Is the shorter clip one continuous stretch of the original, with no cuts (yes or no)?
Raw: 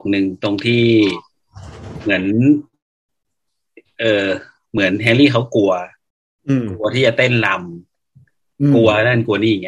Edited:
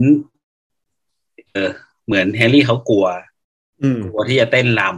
no